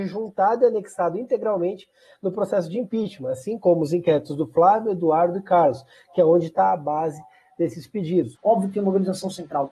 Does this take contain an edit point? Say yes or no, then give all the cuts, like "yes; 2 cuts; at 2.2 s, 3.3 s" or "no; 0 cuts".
yes; 1 cut; at 8.4 s